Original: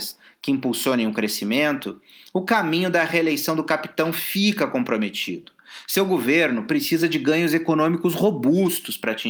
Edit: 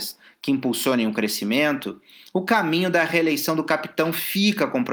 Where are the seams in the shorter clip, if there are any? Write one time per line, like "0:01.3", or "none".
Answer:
none